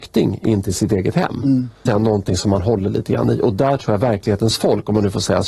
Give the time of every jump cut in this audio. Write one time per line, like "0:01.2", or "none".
0:01.9